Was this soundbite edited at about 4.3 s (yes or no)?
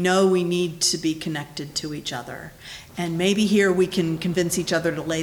no